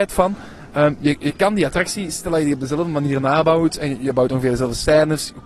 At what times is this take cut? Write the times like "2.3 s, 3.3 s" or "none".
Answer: none

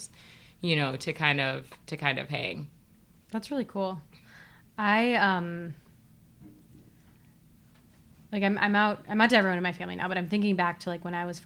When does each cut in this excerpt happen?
none

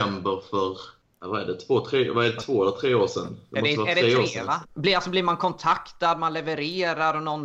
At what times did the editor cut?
4.6 s

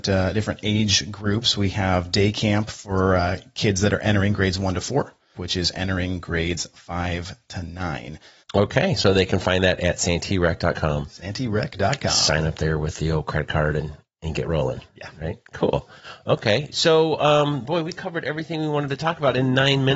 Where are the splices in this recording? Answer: 5.3 s, 8.4 s

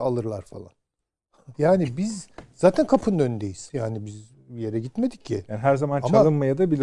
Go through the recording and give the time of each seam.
1.5 s, 3.7 s

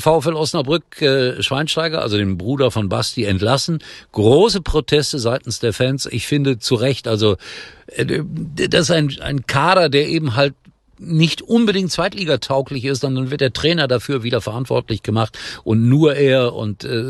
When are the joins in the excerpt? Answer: none

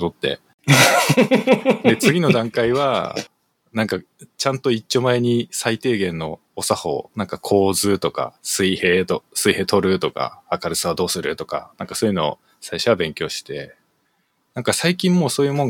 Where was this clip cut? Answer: none

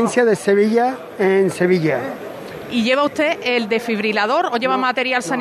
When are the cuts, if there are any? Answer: none

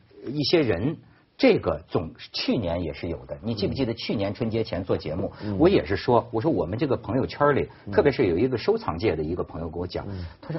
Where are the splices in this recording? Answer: none

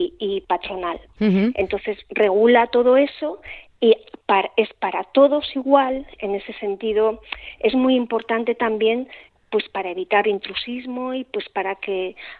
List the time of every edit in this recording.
6.2 s

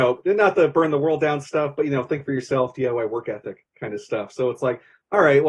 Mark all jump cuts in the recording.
none

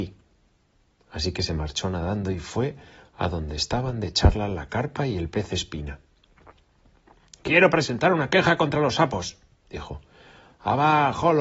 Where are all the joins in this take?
none

